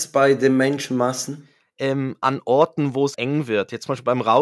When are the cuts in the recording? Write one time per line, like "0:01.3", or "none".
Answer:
0:03.1